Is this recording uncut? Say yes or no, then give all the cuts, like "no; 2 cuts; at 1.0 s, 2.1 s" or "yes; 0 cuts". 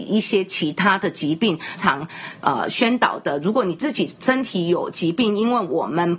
no; 1 cut; at 1.8 s